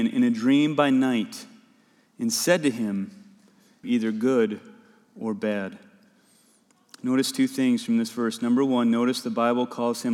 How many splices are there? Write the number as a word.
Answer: one